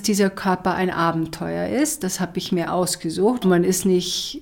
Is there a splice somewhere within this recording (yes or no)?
yes